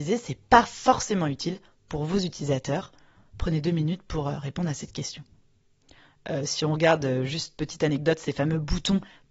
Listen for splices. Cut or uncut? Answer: uncut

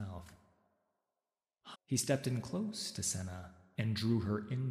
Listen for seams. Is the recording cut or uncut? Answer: cut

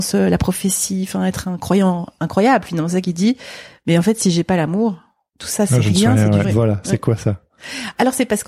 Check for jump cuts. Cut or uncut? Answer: cut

